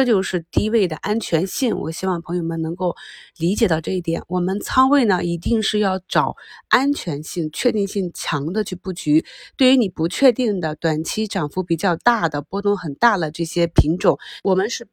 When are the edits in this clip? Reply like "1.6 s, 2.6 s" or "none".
none